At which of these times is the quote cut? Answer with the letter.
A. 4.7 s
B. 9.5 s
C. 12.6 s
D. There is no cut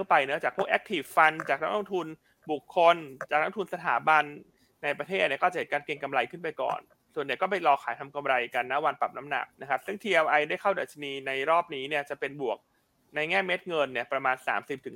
B